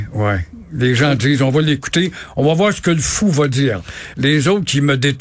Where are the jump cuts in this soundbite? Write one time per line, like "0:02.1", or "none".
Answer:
0:04.1